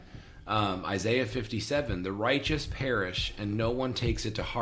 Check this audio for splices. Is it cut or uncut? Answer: uncut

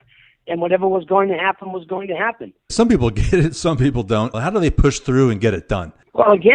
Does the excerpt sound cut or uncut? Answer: cut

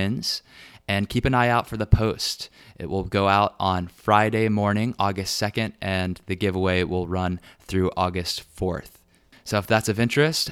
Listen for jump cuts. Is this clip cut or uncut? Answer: cut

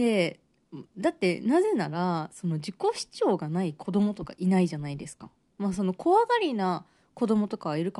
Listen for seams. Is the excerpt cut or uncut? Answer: uncut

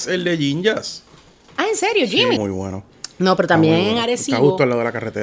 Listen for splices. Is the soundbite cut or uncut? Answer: cut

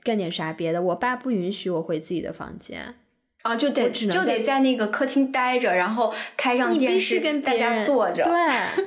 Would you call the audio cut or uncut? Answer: uncut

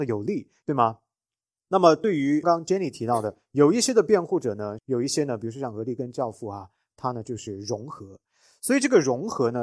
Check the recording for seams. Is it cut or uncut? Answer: cut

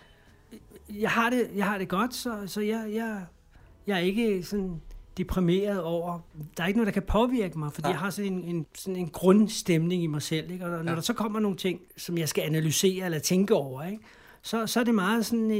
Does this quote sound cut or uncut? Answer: uncut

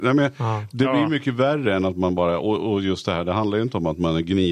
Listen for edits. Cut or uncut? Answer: uncut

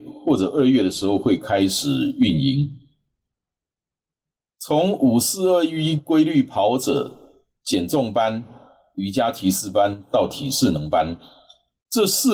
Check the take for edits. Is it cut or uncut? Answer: uncut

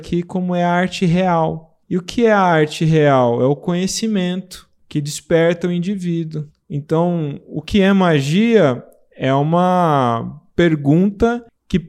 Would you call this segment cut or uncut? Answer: cut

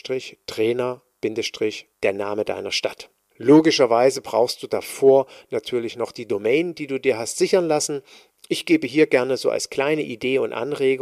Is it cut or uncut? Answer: cut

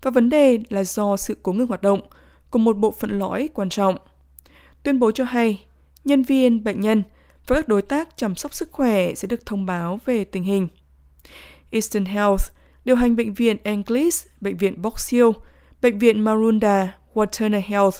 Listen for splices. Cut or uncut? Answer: uncut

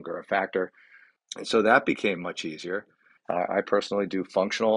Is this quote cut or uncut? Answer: cut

